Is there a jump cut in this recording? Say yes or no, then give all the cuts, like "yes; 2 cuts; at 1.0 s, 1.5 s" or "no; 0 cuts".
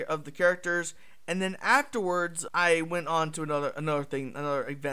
yes; 1 cut; at 2.5 s